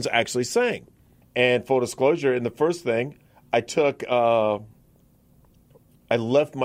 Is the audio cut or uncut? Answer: cut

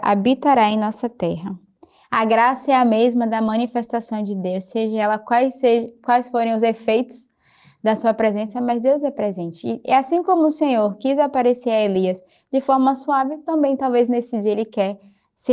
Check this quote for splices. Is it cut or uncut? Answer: cut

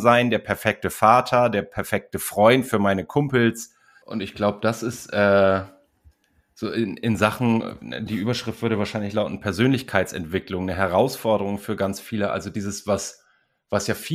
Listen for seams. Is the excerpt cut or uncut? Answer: cut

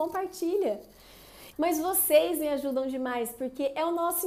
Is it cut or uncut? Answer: cut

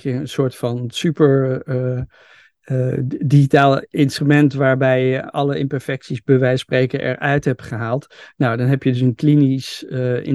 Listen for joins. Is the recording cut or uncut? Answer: uncut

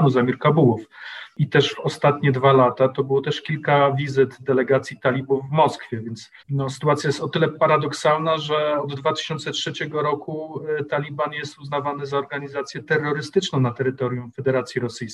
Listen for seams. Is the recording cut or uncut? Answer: cut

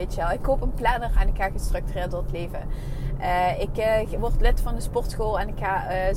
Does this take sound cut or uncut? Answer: uncut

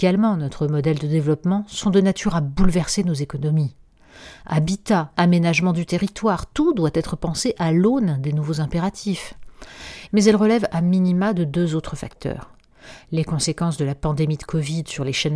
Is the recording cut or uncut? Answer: cut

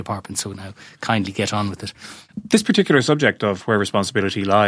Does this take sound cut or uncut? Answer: uncut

